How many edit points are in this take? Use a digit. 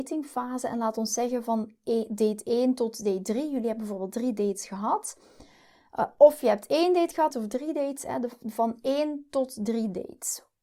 1